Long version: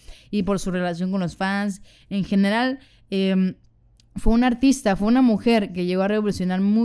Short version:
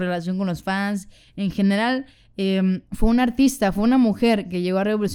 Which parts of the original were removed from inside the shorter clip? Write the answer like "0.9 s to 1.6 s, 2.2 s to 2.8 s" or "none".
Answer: 3.6 s to 4.1 s